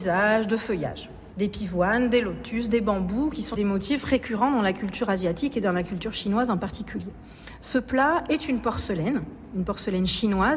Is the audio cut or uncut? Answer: cut